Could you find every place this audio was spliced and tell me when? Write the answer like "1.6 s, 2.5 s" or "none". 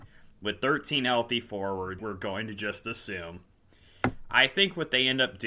2.0 s